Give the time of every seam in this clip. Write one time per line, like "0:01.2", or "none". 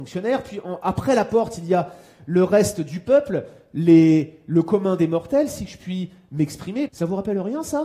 0:06.9